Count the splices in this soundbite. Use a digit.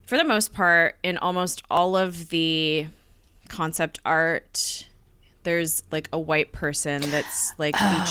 0